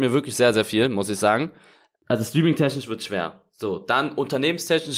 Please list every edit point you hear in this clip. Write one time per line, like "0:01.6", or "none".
none

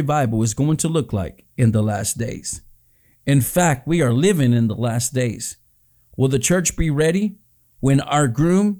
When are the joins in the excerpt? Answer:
none

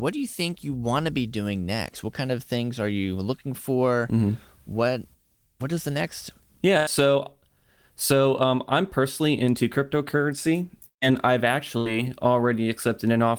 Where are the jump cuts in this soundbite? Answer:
none

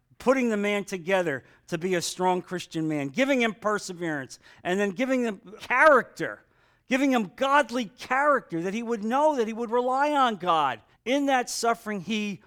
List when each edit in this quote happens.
0:05.6
0:10.9

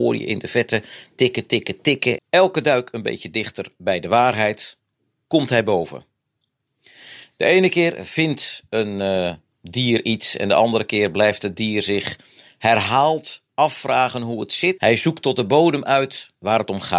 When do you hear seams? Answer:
0:02.2
0:14.8

